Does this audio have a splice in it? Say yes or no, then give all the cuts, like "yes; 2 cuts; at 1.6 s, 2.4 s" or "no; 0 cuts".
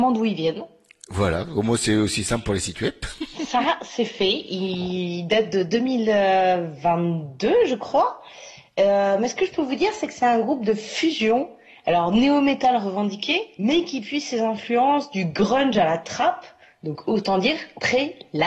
no; 0 cuts